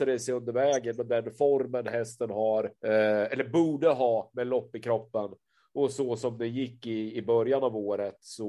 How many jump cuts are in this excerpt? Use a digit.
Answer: 1